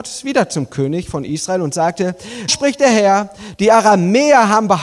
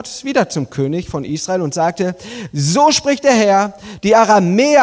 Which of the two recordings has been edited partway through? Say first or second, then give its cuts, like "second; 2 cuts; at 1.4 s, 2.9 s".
first; 1 cut; at 2.5 s